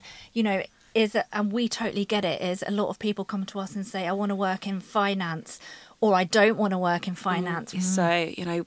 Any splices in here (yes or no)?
yes